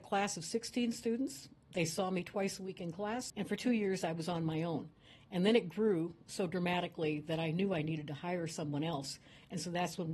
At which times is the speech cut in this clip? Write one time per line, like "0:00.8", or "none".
0:03.3